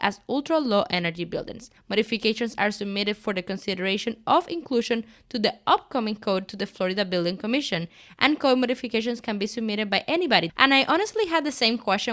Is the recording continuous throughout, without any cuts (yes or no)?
no